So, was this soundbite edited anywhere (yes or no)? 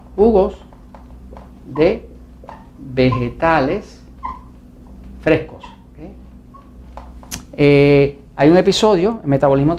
no